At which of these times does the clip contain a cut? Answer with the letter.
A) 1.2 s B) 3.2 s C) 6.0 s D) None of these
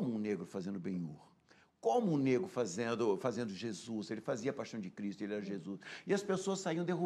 D